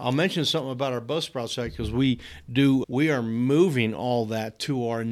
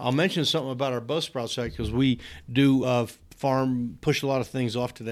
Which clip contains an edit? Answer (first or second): first